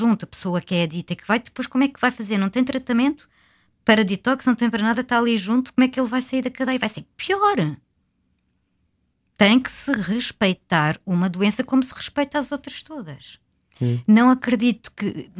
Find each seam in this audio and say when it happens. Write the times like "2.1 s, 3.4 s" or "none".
none